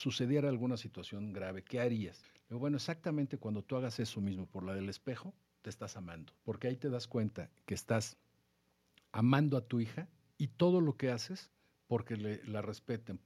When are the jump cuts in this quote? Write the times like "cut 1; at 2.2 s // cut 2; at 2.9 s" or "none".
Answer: cut 1; at 2.2 s // cut 2; at 6.4 s